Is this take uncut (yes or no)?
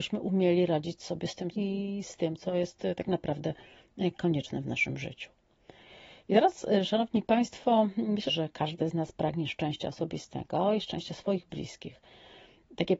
no